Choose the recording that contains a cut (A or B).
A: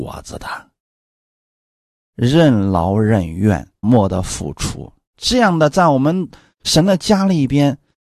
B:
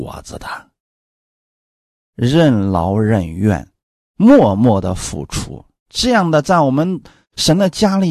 A